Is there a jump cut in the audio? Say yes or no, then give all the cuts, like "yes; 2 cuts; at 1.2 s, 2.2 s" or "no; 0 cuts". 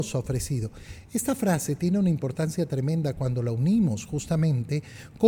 no; 0 cuts